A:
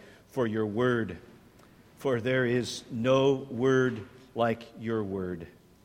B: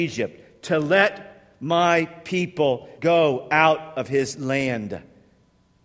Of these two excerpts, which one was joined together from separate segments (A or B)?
B